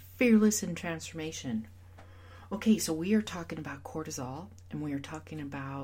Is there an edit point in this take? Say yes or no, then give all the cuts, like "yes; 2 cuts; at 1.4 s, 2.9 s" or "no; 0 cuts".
no; 0 cuts